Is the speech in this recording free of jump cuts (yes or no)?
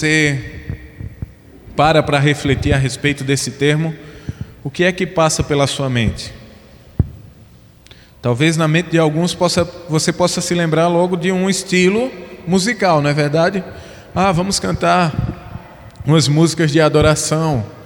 yes